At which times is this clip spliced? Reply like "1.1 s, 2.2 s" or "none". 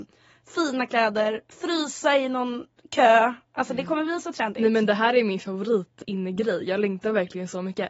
6.0 s